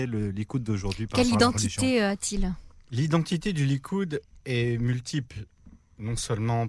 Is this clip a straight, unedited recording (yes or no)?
yes